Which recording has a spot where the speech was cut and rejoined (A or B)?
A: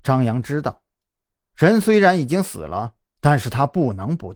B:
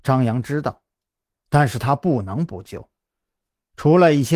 B